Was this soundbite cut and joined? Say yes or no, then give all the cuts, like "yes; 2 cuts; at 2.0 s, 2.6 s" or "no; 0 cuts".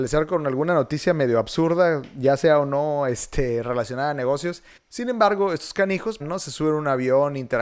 yes; 2 cuts; at 4.8 s, 6.2 s